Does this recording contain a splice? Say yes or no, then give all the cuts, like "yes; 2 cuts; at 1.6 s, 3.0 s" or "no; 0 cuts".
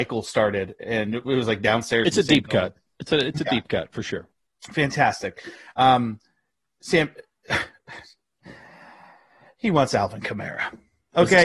no; 0 cuts